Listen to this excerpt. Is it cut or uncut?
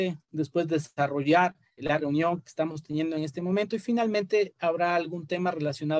cut